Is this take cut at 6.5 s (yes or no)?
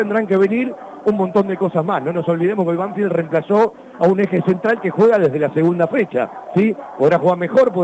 no